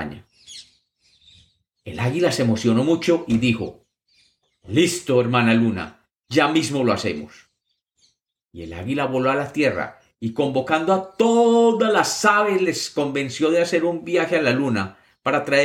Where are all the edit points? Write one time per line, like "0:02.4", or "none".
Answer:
none

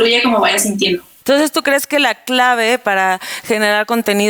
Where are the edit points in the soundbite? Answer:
0:01.2

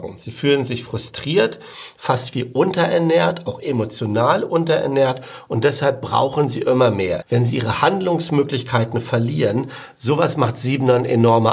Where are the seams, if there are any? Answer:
0:07.2

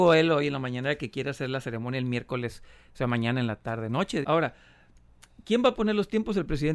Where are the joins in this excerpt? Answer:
0:04.2

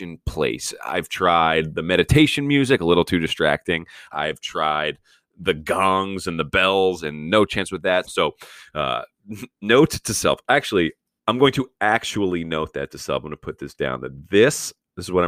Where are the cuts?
0:04.1
0:08.0

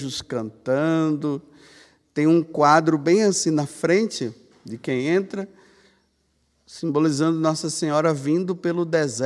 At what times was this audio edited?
none

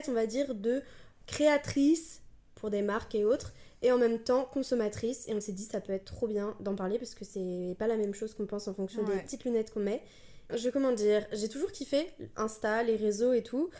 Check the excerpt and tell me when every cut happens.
0:10.5

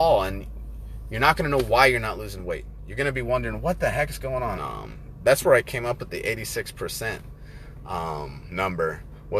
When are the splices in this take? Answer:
0:04.5

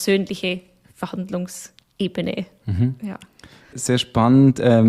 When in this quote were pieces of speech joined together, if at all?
0:03.7

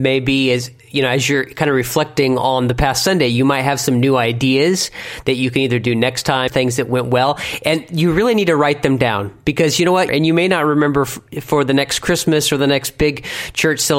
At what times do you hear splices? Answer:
0:06.5
0:10.1

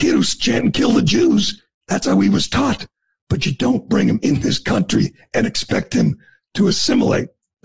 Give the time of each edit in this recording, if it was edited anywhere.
none

